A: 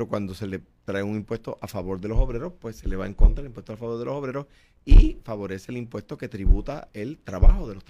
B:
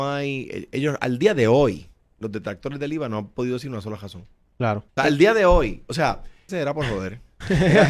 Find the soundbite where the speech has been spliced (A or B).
B